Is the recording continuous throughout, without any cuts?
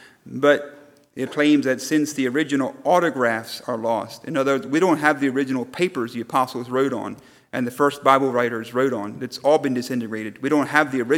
no; 1 cut; at 1.3 s

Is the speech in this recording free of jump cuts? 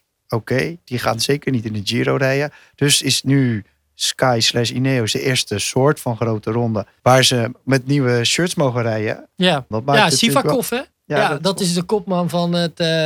no; 3 cuts; at 7.0 s, 9.7 s, 10.9 s

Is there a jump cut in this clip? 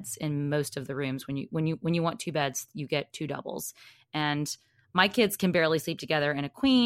no; 0 cuts

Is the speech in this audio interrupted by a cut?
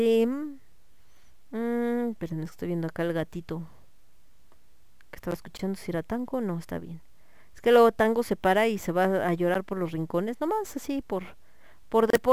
no; 0 cuts

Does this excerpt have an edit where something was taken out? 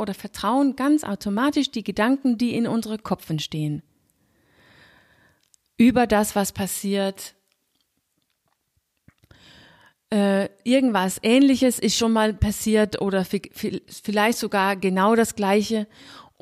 no; 0 cuts

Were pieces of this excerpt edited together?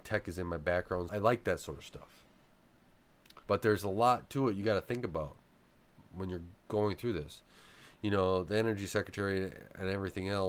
yes; 2 cuts; at 1.1 s, 3.4 s

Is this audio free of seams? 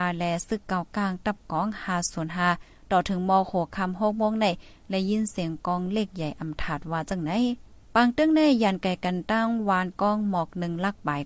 no; 1 cut; at 7.8 s

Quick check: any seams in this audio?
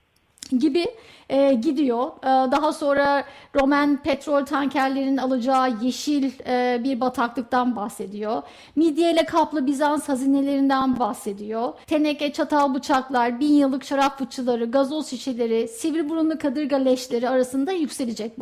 yes; 1 cut; at 11.8 s

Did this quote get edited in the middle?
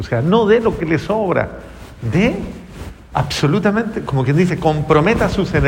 no; 0 cuts

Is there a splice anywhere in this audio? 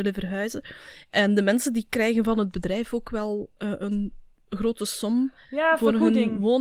no; 0 cuts

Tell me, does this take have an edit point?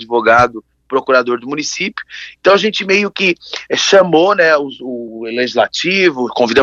no; 0 cuts

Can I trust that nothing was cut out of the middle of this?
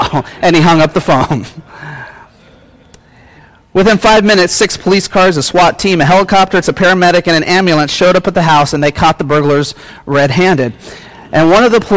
no; 1 cut; at 6.6 s

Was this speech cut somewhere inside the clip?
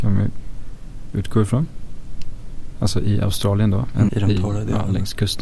yes; 1 cut; at 4.1 s

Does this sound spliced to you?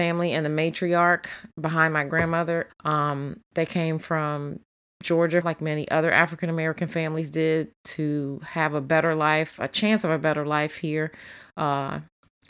yes; 2 cuts; at 2.7 s, 5.4 s

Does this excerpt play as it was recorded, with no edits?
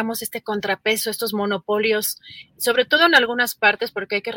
yes; 0 cuts

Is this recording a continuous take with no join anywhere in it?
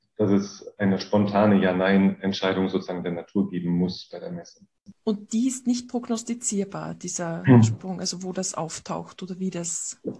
yes; 0 cuts

